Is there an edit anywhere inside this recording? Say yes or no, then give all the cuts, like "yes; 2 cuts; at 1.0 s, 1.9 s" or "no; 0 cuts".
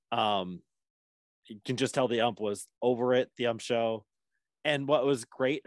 no; 0 cuts